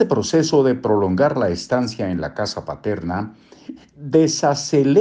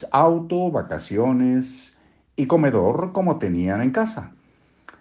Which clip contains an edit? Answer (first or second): first